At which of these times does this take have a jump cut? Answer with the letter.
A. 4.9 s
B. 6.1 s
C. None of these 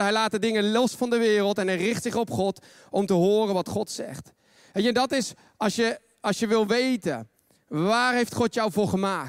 C